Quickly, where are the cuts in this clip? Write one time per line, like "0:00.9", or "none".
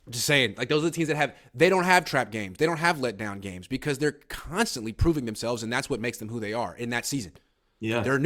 none